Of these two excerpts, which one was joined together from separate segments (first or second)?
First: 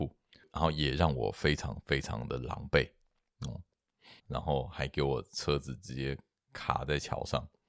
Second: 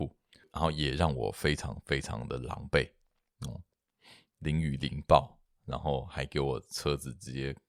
first